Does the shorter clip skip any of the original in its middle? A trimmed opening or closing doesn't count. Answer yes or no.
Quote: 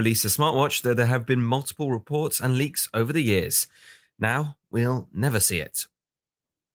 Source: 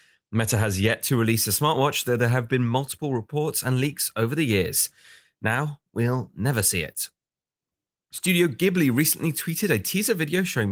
no